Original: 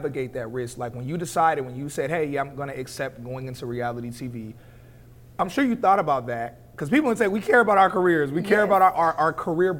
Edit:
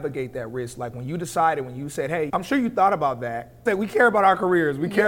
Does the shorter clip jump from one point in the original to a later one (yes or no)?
yes